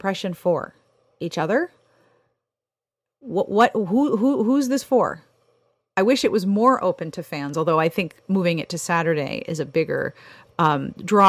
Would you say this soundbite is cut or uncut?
uncut